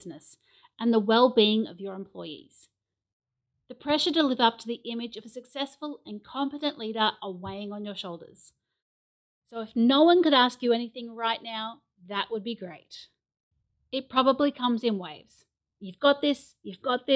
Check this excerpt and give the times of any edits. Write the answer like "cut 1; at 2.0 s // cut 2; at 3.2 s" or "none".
none